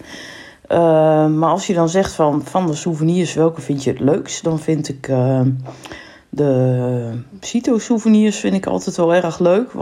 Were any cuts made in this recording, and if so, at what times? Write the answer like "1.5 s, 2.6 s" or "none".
none